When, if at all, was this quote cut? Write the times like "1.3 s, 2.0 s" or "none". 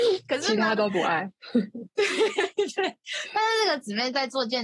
none

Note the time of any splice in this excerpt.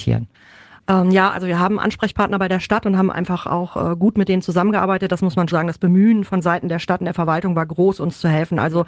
5.5 s

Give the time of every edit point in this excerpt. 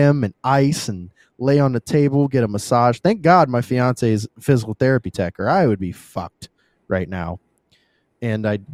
none

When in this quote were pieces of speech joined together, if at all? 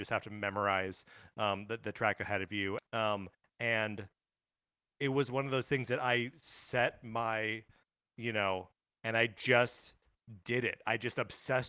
2.8 s, 9.0 s

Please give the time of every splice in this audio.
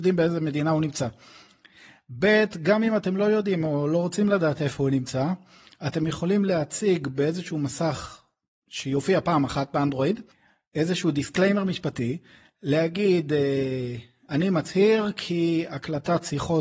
none

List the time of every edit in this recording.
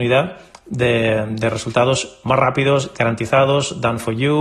none

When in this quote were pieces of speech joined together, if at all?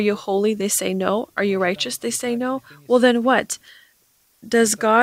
none

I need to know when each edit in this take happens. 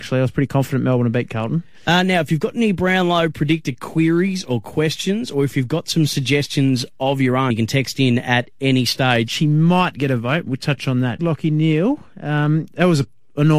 7.5 s, 9.3 s, 11.2 s

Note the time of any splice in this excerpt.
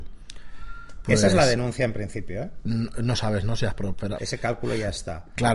4.2 s

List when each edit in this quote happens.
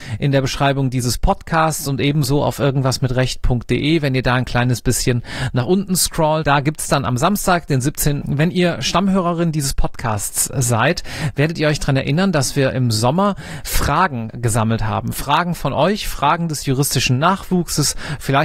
8.2 s

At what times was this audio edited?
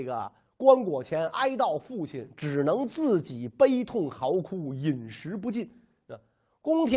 none

